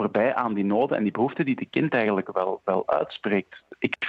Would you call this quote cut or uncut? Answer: uncut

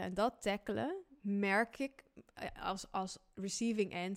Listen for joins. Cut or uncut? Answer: uncut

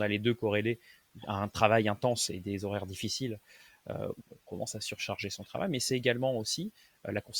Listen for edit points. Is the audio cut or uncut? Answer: cut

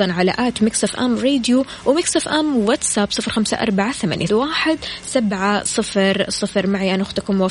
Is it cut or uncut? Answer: cut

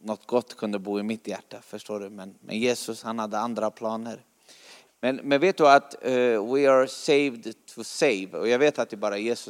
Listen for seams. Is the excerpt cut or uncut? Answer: cut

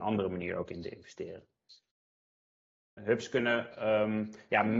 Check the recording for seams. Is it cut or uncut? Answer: cut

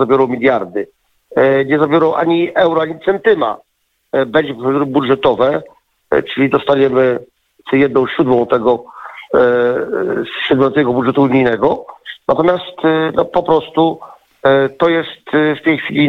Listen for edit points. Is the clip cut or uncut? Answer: uncut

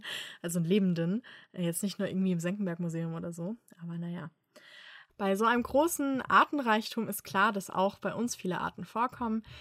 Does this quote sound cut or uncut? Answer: cut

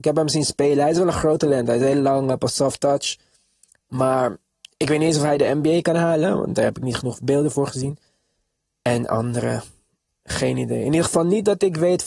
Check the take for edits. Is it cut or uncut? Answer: cut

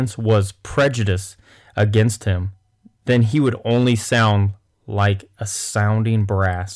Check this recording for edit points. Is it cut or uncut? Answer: uncut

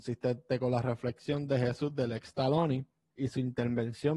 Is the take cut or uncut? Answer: cut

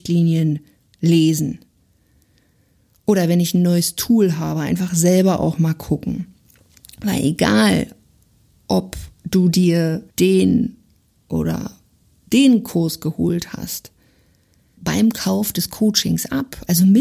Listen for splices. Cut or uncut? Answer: cut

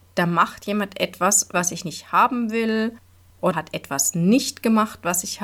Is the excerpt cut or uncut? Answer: cut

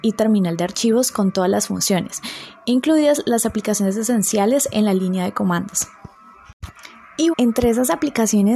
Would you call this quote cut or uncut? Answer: cut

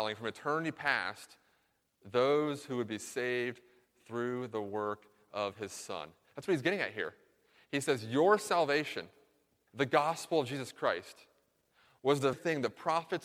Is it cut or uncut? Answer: cut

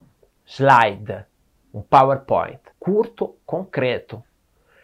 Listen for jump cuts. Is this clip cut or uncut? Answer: cut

